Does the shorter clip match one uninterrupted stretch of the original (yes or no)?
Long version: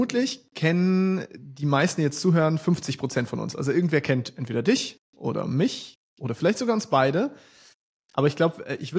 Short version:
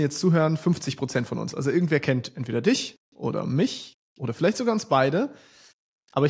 yes